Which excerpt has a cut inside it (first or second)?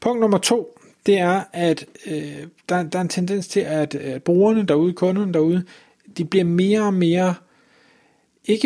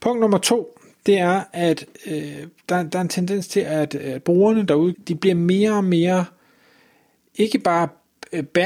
second